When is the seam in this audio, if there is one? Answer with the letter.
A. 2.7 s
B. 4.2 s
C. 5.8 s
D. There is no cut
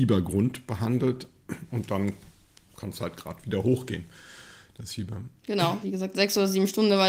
C